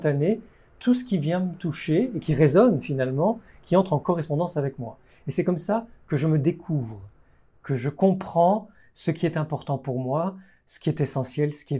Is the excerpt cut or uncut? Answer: uncut